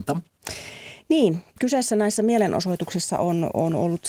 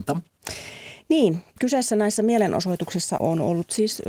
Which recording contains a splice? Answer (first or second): second